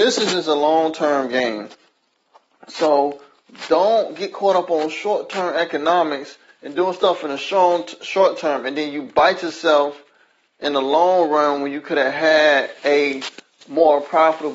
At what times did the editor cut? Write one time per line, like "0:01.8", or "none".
none